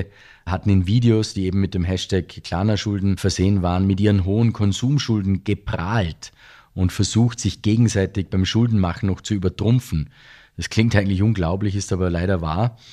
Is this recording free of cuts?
yes; 0 cuts

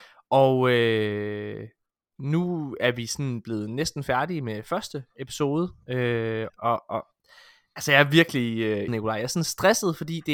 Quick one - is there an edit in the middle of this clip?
yes; 2 cuts; at 6.5 s, 8.9 s

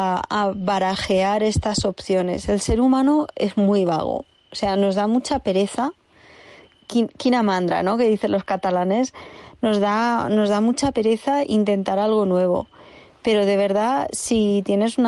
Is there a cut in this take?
no; 0 cuts

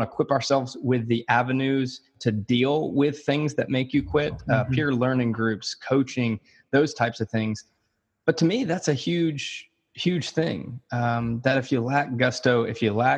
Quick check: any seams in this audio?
no; 0 cuts

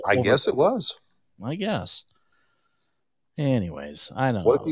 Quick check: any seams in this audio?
no; 0 cuts

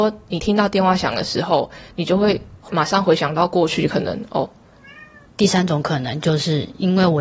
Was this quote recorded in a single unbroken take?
no; 1 cut; at 5.3 s

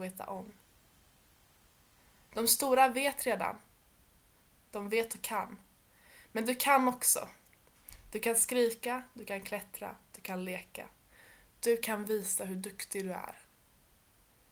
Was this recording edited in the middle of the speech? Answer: no; 0 cuts

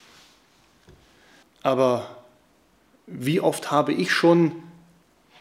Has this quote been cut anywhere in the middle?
yes; 1 cut; at 1.4 s

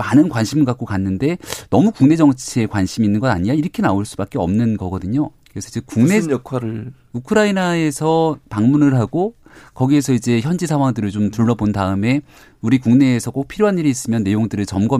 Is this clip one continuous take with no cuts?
no; 1 cut; at 5.3 s

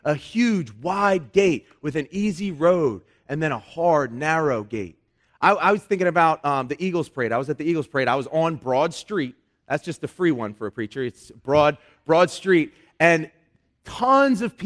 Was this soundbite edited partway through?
no; 0 cuts

